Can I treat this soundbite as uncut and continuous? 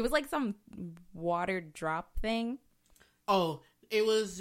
no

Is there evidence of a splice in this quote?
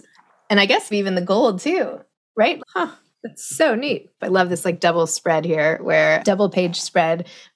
yes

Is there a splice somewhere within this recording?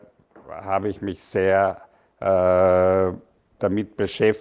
no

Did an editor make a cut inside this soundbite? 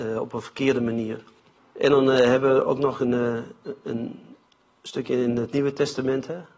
yes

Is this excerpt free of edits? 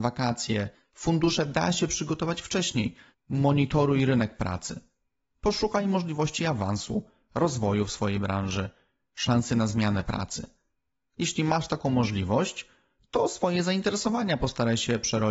no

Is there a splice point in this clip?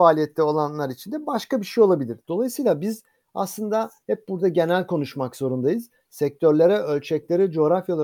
no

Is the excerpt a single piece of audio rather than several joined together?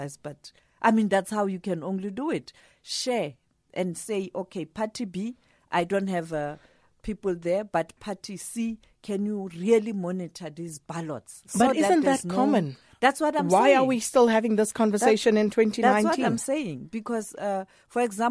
yes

